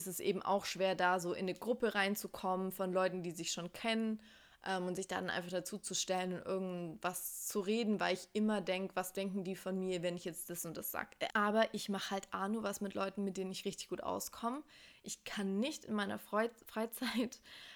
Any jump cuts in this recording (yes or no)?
yes